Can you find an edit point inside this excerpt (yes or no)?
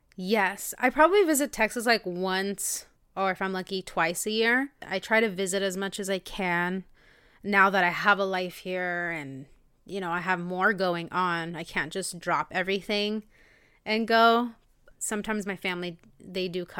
no